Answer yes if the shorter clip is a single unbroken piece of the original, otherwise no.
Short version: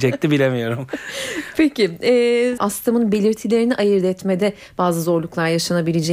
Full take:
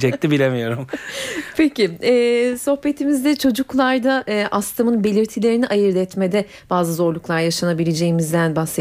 no